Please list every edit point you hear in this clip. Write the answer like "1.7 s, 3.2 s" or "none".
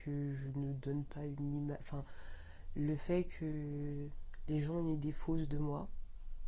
none